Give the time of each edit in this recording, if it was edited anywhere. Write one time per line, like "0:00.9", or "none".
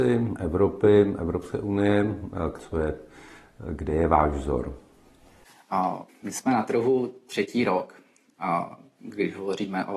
0:02.6
0:06.1